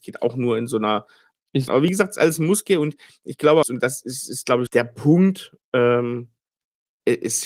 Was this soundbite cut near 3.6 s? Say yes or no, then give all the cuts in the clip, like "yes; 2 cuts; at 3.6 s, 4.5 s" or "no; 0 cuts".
yes; 3 cuts; at 1.7 s, 3.6 s, 4.7 s